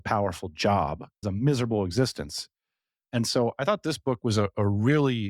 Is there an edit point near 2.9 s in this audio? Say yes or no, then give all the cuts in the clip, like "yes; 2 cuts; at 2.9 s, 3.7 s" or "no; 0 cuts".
no; 1 cut; at 1.2 s